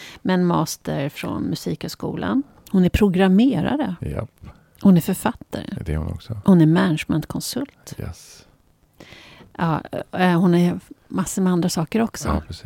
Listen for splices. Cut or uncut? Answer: uncut